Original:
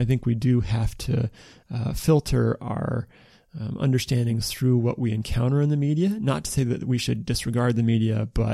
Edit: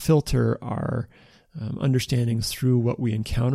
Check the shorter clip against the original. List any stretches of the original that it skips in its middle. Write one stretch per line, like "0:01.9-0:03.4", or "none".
none